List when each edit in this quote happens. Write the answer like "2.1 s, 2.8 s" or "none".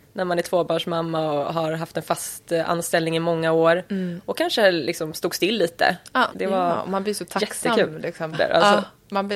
6.3 s, 8.3 s

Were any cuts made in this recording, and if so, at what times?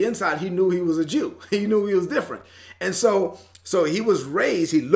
none

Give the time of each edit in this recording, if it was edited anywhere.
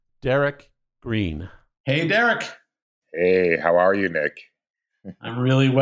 none

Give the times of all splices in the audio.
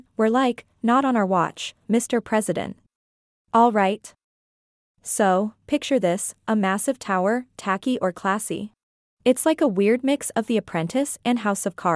3.4 s, 7.5 s, 9.0 s

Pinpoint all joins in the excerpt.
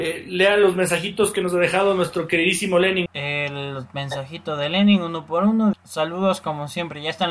3.1 s, 5.7 s

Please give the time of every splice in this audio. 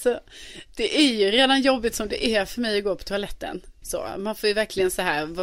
3.8 s

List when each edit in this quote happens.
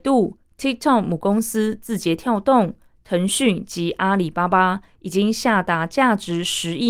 none

